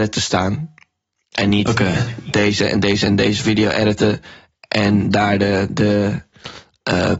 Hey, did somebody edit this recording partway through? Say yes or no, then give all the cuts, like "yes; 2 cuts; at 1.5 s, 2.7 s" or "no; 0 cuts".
no; 0 cuts